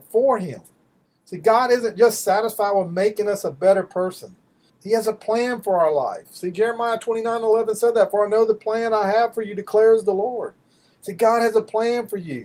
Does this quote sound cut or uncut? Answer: uncut